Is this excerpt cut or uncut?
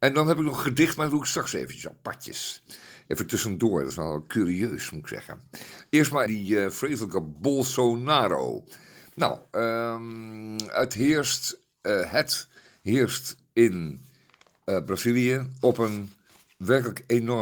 cut